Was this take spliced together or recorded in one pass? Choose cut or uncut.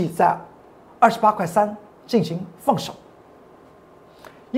uncut